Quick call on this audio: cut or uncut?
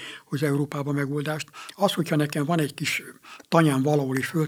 uncut